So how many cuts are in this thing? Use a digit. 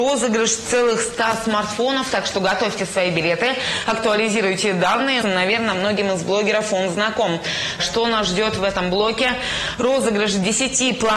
2